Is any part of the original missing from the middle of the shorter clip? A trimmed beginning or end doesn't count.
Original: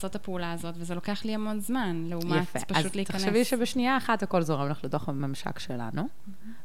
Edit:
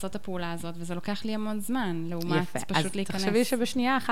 no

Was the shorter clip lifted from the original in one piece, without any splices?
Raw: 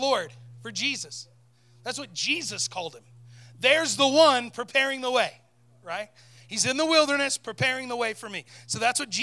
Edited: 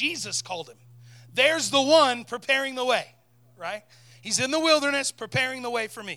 yes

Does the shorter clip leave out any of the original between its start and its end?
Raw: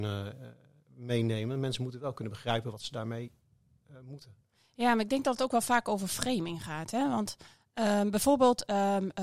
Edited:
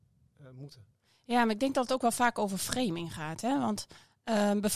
no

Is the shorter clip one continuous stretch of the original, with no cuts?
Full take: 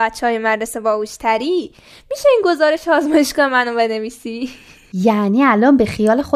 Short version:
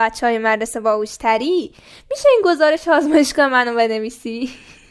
yes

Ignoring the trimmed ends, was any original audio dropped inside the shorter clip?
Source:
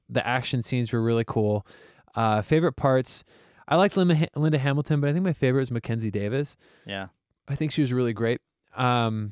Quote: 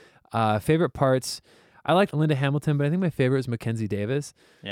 yes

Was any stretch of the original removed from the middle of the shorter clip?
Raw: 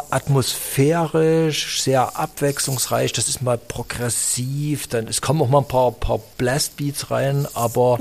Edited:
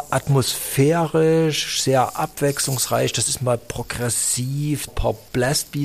yes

